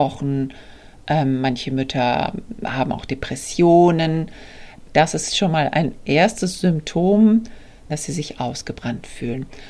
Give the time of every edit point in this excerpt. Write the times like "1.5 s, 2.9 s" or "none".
4.9 s, 7.9 s